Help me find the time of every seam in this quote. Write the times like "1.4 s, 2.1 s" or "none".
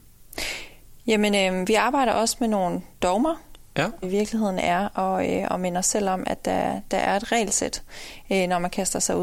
4.0 s